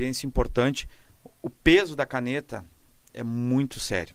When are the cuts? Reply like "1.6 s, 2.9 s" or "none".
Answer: none